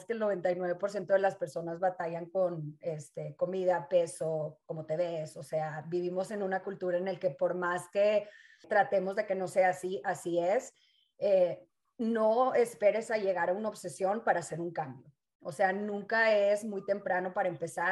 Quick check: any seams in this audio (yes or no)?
no